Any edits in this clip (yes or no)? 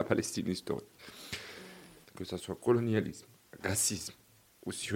yes